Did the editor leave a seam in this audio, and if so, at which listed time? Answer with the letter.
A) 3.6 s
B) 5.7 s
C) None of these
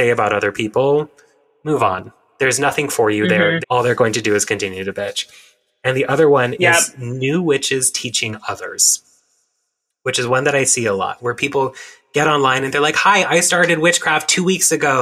A